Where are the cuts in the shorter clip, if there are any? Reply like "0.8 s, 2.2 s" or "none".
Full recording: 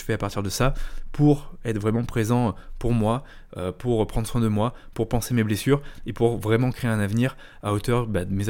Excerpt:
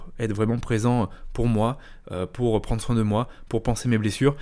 none